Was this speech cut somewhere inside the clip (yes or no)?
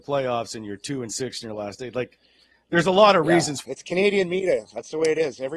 yes